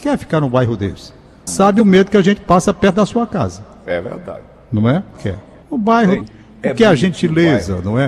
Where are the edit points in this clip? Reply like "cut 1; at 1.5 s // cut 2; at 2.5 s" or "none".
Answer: cut 1; at 1.5 s // cut 2; at 5.2 s // cut 3; at 6.2 s